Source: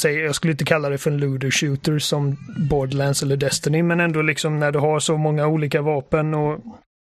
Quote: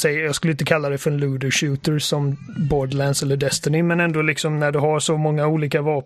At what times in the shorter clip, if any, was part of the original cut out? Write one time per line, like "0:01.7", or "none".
none